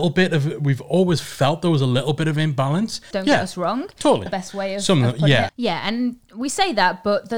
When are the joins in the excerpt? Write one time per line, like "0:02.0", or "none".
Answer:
0:03.1
0:04.3
0:05.5